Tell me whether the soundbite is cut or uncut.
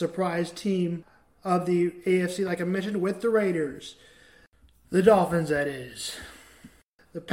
uncut